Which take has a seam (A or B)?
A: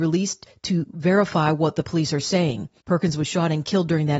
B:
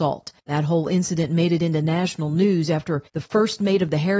A